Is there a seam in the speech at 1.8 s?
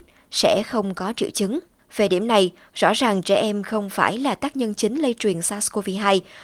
yes; 1 cut; at 1.8 s

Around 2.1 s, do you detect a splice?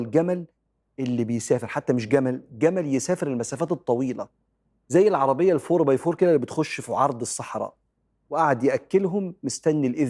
no; 0 cuts

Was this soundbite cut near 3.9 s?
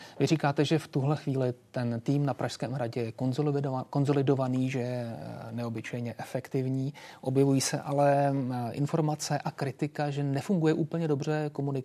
no; 0 cuts

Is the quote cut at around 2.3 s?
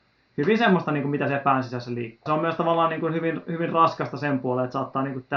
yes; 1 cut; at 2.3 s

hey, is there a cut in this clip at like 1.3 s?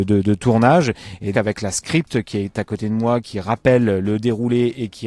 yes; 2 cuts; at 1.3 s, 3.2 s

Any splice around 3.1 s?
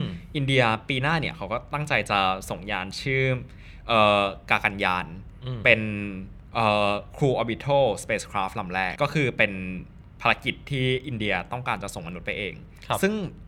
no; 1 cut; at 8.9 s

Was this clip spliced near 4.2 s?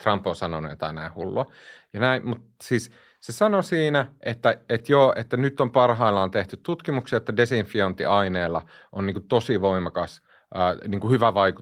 no; 1 cut; at 1.8 s

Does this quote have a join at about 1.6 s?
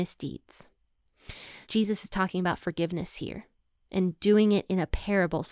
yes; 1 cut; at 1.6 s

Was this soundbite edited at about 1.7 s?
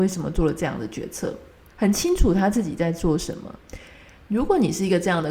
yes; 2 cuts; at 1.7 s, 4.2 s

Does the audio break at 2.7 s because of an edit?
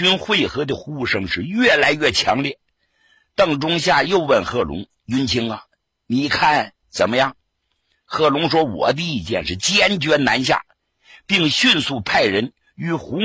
no; 0 cuts

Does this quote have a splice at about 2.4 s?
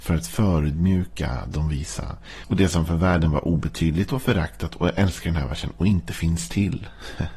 yes; 1 cut; at 2.4 s

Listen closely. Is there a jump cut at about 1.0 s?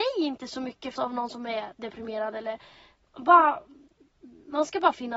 yes; 1 cut; at 1.0 s

